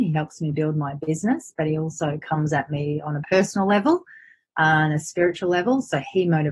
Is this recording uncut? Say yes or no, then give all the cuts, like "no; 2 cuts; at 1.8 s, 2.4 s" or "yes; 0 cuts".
yes; 0 cuts